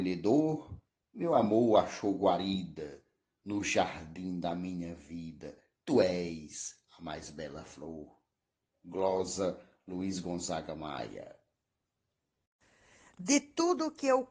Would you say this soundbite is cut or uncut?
uncut